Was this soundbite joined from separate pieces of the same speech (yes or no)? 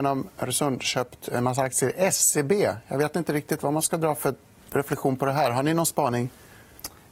no